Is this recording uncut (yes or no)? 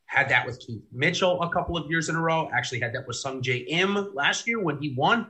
yes